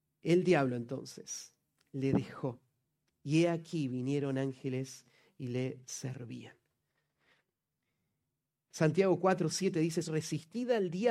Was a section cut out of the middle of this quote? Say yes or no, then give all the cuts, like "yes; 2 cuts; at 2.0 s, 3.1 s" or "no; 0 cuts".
yes; 1 cut; at 10.0 s